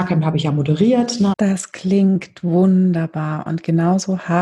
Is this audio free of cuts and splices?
no; 1 cut; at 1.3 s

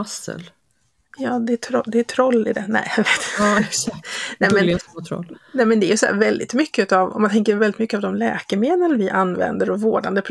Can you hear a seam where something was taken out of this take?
no; 0 cuts

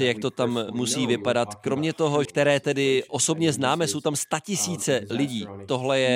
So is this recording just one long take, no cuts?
no; 1 cut; at 2.3 s

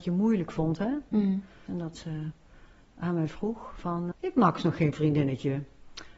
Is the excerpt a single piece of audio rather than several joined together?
no; 2 cuts; at 1.7 s, 4.1 s

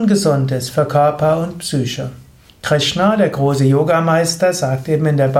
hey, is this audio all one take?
no; 1 cut; at 2.5 s

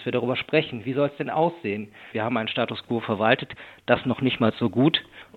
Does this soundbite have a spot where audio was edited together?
yes; 1 cut; at 2.1 s

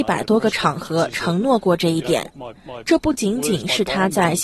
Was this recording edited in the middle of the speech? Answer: no; 0 cuts

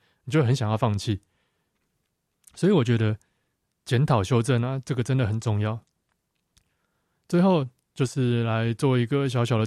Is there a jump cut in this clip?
no; 0 cuts

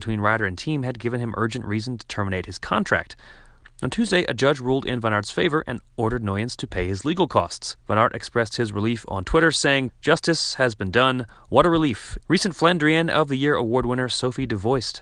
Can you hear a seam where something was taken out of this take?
yes; 3 cuts; at 7.8 s, 9.9 s, 12.2 s

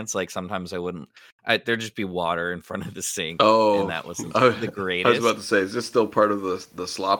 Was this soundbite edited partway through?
no; 0 cuts

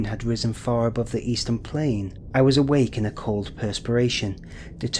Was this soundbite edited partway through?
no; 0 cuts

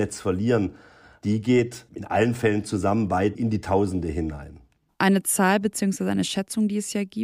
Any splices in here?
no; 0 cuts

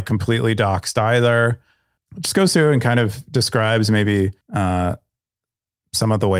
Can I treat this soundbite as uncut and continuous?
no; 2 cuts; at 2.0 s, 4.4 s

